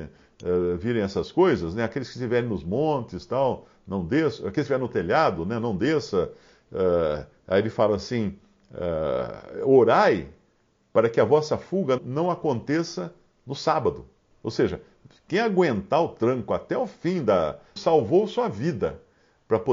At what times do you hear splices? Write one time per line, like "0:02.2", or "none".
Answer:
0:12.0
0:14.3
0:17.8